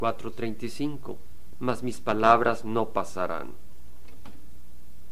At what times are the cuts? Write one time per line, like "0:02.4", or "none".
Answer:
0:01.5